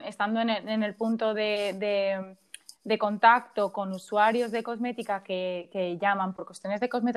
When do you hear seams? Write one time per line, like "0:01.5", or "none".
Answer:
none